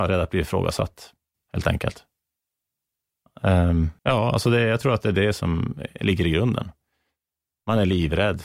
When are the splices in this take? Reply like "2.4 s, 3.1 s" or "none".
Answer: 1.3 s, 4.0 s